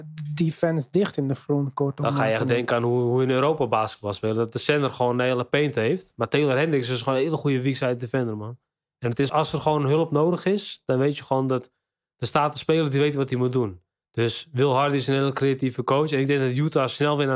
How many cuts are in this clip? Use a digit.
1